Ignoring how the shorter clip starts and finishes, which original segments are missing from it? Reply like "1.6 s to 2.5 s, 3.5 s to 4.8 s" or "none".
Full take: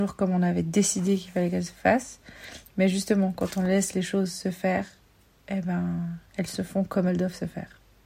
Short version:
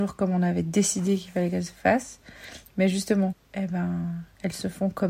3.3 s to 5.3 s